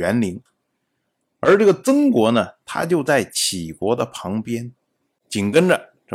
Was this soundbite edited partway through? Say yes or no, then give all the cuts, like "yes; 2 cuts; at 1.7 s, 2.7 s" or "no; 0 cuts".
yes; 1 cut; at 5.2 s